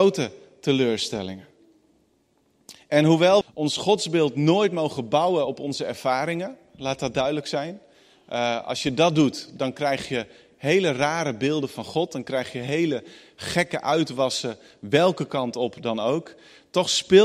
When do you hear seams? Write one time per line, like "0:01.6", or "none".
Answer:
0:03.4